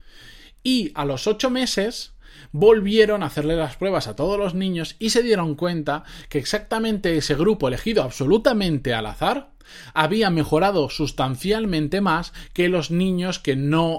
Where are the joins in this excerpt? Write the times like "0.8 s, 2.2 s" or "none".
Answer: none